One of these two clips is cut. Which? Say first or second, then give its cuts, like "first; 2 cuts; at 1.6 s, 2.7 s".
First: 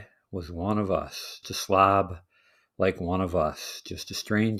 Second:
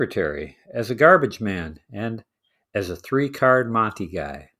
first; 1 cut; at 1.4 s